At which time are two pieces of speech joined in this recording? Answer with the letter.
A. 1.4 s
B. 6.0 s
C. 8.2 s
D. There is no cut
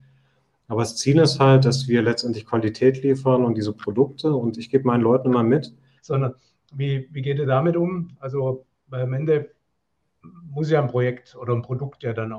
B